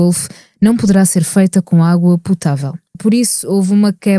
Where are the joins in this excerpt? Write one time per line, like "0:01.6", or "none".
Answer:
0:02.9